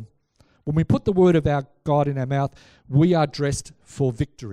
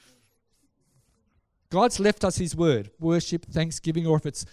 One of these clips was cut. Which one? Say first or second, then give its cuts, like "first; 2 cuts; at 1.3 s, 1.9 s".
second; 1 cut; at 3.0 s